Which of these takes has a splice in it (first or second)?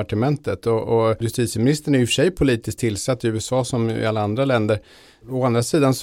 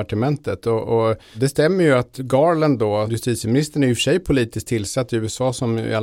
first